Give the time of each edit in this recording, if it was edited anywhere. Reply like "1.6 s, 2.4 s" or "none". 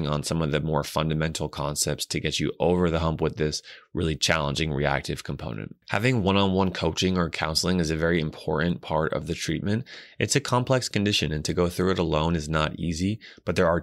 none